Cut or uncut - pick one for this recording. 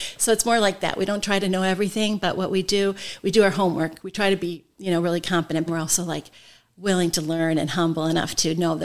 cut